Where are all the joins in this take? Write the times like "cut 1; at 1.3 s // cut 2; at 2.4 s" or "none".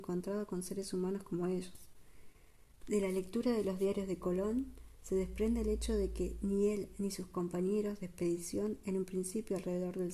cut 1; at 2.8 s